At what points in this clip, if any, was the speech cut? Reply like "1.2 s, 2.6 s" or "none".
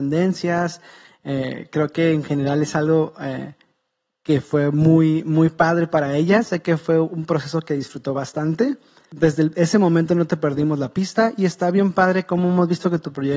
none